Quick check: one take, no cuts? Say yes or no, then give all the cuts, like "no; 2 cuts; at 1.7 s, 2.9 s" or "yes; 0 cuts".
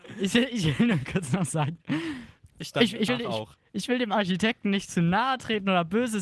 yes; 0 cuts